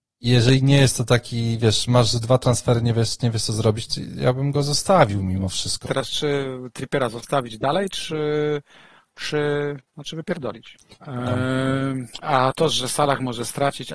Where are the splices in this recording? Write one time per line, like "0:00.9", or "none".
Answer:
0:05.8
0:10.9
0:12.2